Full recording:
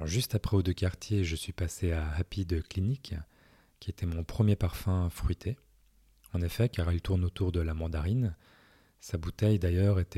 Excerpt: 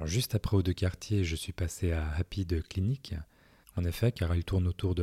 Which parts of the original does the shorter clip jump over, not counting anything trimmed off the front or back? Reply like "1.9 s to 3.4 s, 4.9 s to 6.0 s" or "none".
3.6 s to 6.2 s